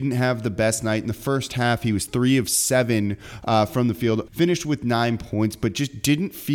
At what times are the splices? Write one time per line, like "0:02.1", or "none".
0:04.3